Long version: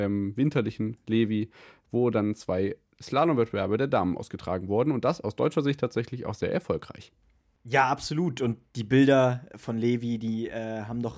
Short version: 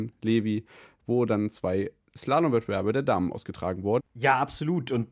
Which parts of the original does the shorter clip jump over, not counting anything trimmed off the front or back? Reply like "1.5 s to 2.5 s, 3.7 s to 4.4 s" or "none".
4.8 s to 7.5 s